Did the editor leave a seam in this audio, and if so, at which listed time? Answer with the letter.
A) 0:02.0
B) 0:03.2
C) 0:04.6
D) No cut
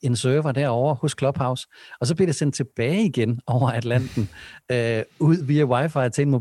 D